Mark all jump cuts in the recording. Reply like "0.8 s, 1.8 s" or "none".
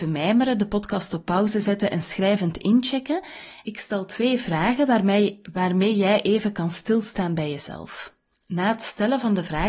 3.7 s